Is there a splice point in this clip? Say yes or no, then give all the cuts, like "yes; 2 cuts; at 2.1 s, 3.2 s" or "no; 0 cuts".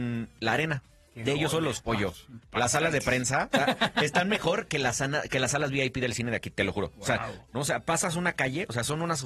yes; 2 cuts; at 1.8 s, 7.5 s